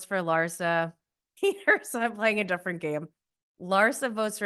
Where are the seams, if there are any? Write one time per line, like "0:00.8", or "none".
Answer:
0:01.4